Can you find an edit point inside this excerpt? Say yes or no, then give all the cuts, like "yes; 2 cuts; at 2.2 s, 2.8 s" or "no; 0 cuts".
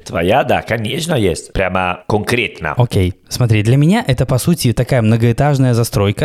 yes; 1 cut; at 1.5 s